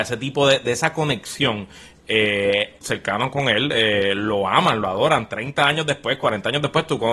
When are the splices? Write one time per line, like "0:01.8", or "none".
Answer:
0:02.8